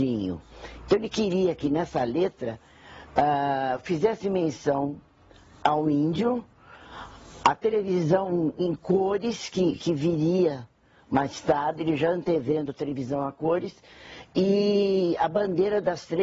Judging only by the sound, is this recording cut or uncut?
uncut